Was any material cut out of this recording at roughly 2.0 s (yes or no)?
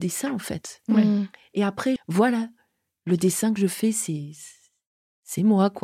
yes